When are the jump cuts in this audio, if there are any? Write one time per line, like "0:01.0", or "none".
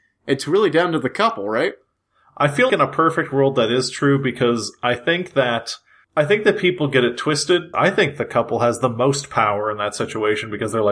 0:02.7
0:07.7